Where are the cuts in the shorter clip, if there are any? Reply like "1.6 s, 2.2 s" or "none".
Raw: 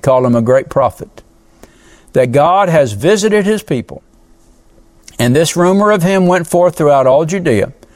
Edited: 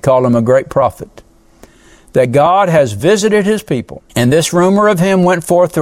4.1 s